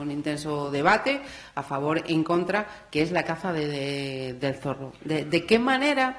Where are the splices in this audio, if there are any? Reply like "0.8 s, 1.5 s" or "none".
none